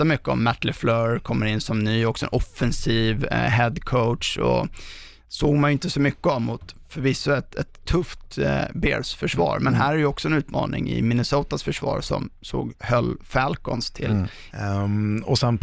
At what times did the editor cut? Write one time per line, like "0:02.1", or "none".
0:14.5